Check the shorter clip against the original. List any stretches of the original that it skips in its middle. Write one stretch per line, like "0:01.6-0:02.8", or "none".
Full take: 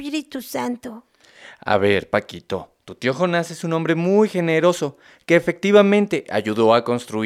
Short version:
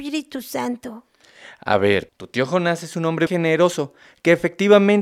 0:02.1-0:02.8
0:03.9-0:04.3